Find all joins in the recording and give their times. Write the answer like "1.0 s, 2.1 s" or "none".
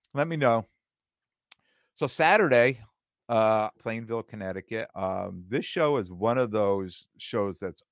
3.7 s, 4.9 s